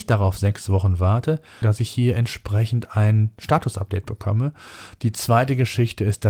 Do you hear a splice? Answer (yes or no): yes